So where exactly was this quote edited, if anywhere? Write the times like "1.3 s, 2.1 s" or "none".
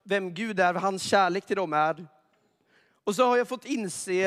none

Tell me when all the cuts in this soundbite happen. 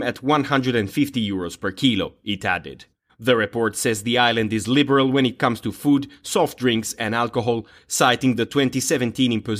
3.1 s, 7.8 s

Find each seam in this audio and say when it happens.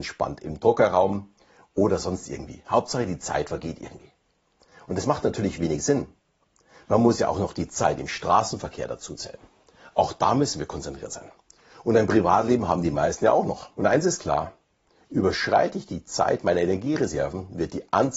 13.7 s

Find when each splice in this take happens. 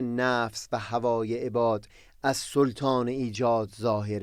none

